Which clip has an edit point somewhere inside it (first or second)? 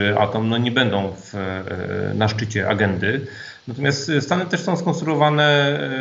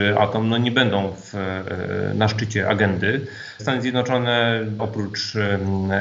second